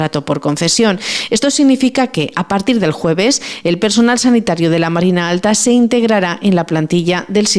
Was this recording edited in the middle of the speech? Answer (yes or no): no